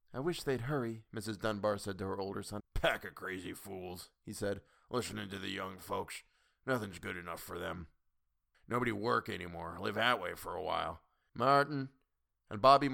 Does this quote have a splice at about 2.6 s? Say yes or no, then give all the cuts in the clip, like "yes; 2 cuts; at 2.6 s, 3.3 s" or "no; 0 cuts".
yes; 3 cuts; at 2.6 s, 8.5 s, 11.3 s